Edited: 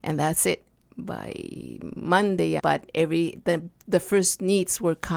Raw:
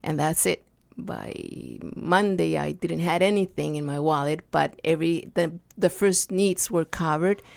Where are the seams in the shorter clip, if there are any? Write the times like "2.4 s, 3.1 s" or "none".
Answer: 2.6 s